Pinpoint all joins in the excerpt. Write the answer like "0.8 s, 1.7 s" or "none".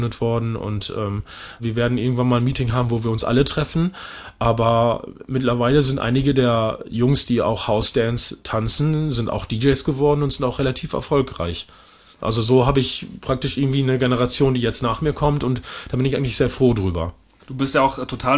none